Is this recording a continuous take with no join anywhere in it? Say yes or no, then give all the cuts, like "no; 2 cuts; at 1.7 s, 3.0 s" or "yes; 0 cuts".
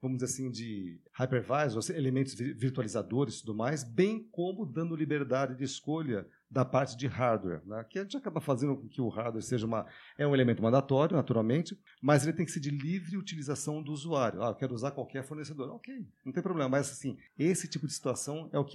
yes; 0 cuts